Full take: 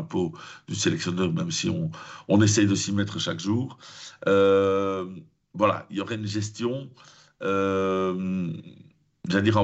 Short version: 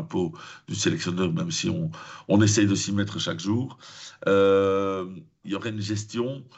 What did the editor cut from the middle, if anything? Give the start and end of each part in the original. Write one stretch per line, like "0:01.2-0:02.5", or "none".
0:05.4-0:05.9